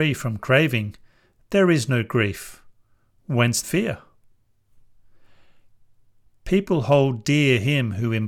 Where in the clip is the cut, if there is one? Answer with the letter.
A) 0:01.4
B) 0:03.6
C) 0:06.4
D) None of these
B